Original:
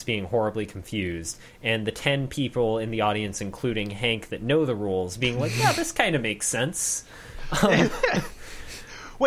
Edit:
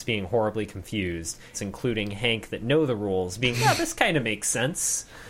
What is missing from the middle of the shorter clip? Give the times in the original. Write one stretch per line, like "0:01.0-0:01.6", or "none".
0:01.5-0:03.3
0:05.3-0:05.5

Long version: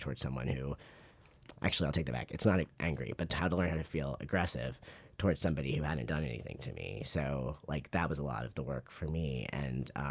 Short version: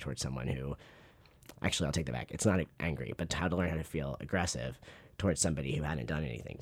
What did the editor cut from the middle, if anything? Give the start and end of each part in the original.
none

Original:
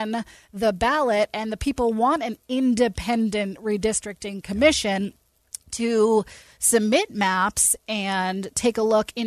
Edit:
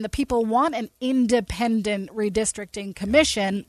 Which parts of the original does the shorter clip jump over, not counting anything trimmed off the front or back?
none

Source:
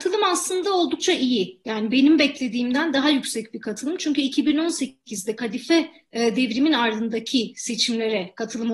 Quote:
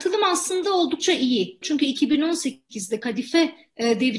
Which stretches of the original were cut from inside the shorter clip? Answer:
0:01.6-0:04.0

